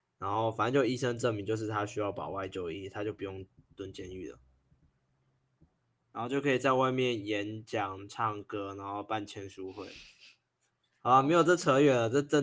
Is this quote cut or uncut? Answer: uncut